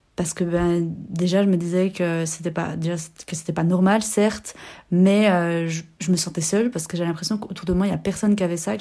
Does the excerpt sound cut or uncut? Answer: uncut